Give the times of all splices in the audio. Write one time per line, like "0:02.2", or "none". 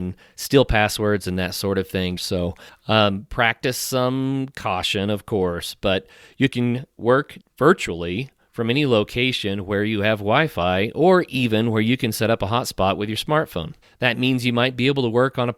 0:02.2